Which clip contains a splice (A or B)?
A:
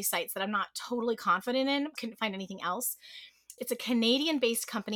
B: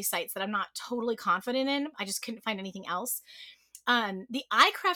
A